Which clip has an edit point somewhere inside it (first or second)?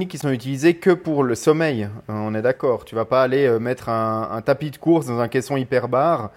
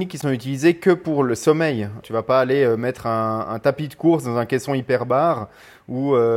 second